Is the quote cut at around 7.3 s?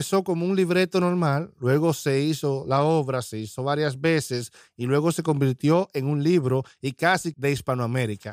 yes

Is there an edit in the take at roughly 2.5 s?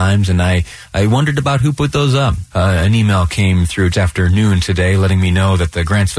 yes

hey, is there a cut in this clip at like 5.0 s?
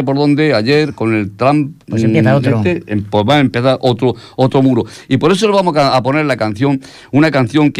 no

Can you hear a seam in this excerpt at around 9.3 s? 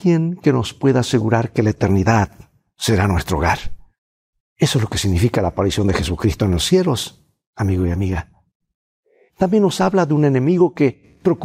yes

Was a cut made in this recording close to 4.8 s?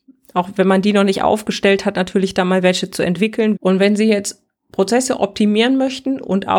no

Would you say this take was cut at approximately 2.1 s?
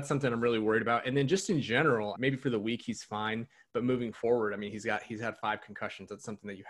yes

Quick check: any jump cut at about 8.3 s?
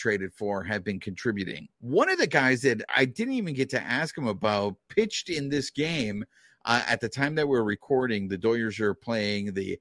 no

